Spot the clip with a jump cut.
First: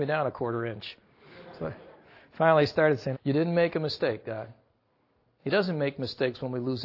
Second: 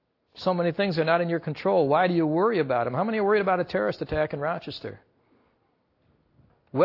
first; 1 cut; at 3.1 s

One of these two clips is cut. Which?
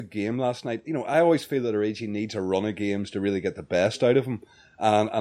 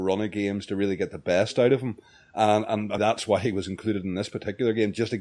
second; 1 cut; at 3.0 s

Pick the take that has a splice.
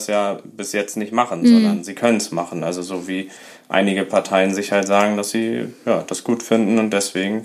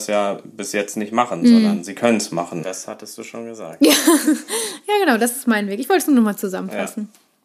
second; 1 cut; at 2.6 s

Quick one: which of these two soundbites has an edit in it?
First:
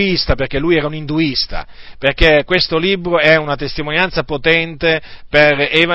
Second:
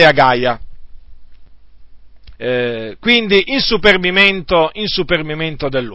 second; 1 cut; at 2.3 s

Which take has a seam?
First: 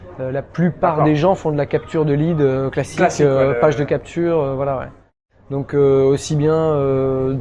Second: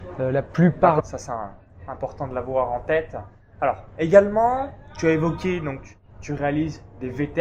second; 1 cut; at 1.0 s

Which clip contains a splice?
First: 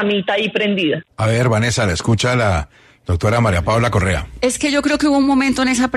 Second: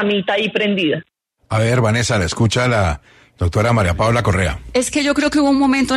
first; 1 cut; at 1.1 s

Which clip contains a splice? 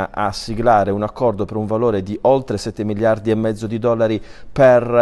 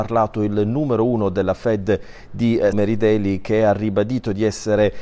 second; 1 cut; at 2.7 s

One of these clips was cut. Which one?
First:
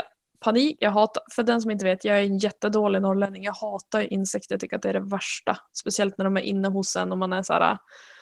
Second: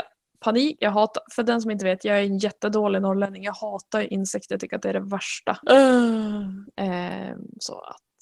second; 2 cuts; at 5.6 s, 6.7 s

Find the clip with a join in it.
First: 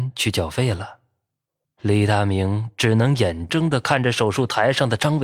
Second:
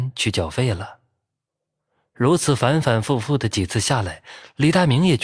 first; 2 cuts; at 1.6 s, 3.5 s

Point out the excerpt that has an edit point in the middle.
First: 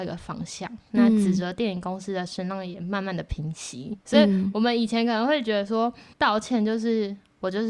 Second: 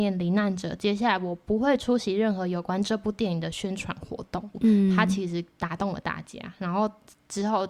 first; 2 cuts; at 4.0 s, 6.1 s

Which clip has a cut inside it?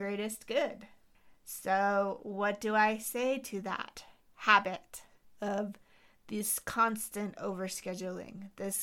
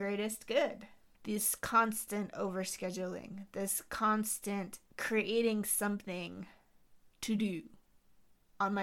second; 2 cuts; at 1.2 s, 4.9 s

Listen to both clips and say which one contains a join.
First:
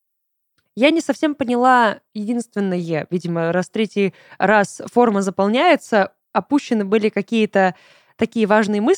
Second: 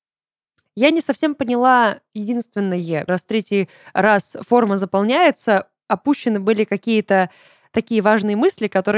second; 1 cut; at 3.1 s

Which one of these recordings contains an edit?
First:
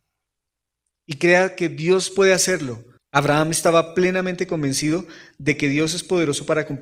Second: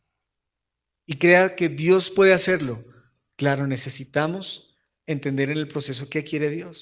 first; 1 cut; at 3.0 s

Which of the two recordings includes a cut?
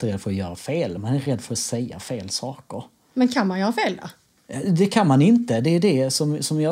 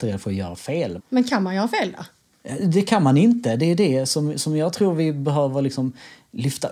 second; 1 cut; at 1.0 s

